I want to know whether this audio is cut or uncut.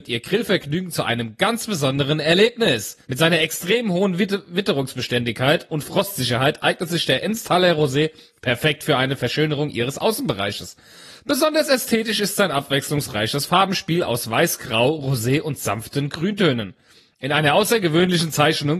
cut